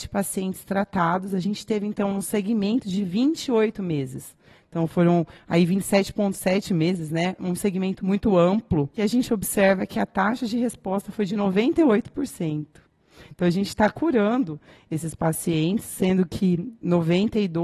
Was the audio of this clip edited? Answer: no; 0 cuts

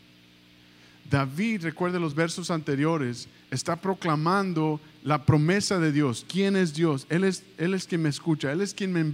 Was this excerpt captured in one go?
yes; 0 cuts

